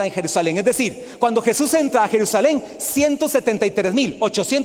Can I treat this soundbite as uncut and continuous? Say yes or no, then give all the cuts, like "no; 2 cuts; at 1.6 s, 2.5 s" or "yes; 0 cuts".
yes; 0 cuts